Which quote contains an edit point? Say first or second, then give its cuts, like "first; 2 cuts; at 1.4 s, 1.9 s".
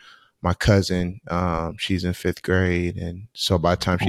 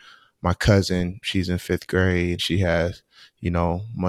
second; 2 cuts; at 1.2 s, 2.4 s